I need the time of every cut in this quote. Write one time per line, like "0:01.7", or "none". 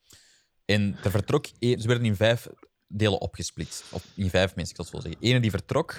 0:01.8